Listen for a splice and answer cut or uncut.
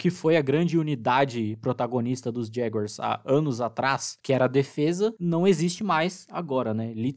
uncut